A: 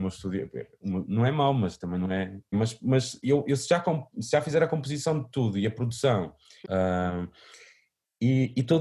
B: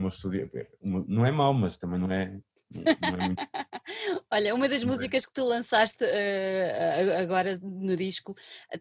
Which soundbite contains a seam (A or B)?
A